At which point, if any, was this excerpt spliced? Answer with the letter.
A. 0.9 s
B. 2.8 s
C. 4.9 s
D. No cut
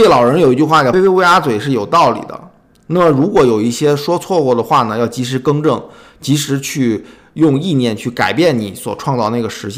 A